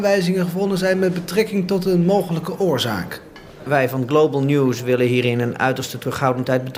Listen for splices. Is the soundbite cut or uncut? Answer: cut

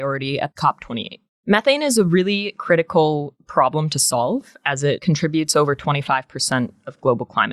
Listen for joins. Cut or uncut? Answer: uncut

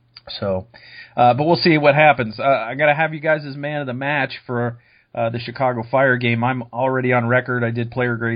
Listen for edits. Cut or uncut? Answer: uncut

